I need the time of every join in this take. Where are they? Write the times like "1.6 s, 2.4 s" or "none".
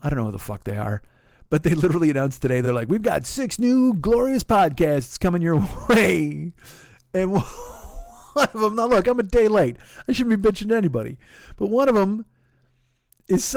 none